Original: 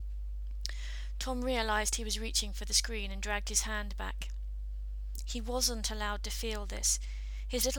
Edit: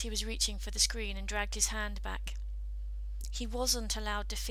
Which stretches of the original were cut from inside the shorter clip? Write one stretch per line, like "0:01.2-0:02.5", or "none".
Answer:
none